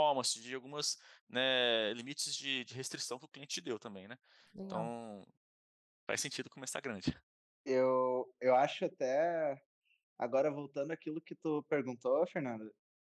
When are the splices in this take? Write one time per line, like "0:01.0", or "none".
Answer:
none